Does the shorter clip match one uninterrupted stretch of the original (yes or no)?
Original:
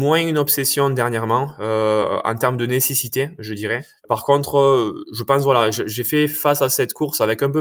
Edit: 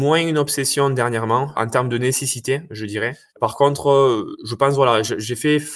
no